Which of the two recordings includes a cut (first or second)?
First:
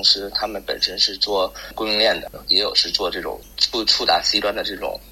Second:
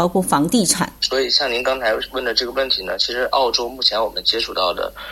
second